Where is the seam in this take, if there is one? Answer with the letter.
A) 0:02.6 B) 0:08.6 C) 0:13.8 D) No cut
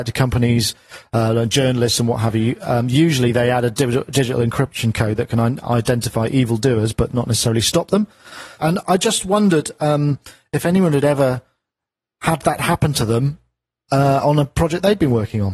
B